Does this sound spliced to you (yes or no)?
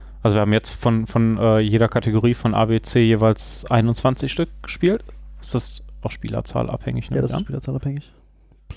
no